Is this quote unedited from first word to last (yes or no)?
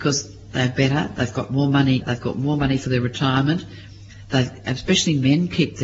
no